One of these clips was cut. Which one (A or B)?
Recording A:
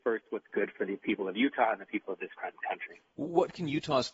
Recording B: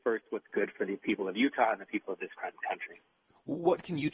A